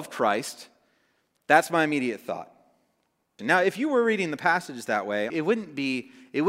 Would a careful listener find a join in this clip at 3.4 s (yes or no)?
yes